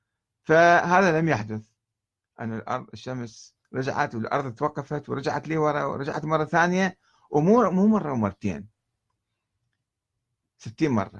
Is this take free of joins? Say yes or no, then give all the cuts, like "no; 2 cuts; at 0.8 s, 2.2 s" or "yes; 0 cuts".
no; 1 cut; at 3.6 s